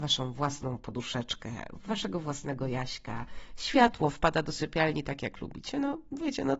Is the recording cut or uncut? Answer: uncut